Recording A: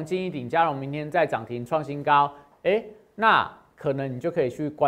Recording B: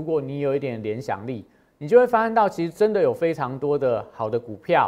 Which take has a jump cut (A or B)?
A